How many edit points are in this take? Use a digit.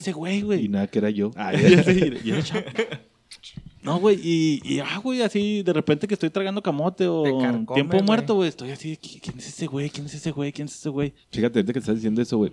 1